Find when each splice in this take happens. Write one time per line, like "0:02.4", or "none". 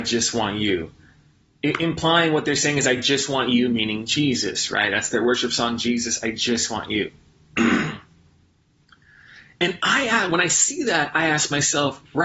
none